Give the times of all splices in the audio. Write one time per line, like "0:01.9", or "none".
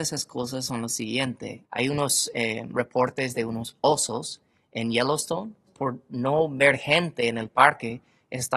0:01.6
0:05.7